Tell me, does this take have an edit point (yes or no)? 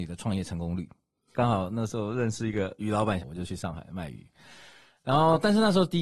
yes